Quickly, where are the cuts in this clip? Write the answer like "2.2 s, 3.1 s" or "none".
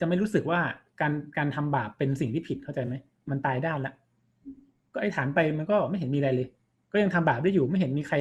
none